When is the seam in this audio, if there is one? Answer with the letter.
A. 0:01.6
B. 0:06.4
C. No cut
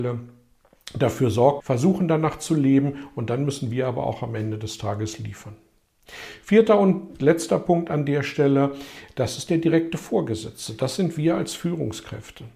A